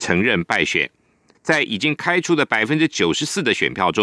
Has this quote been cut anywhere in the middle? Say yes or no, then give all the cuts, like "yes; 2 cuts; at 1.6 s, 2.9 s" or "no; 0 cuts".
yes; 1 cut; at 1.3 s